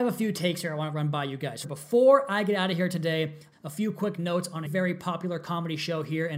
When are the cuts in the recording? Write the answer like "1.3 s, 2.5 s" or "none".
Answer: 1.6 s, 3.5 s, 4.7 s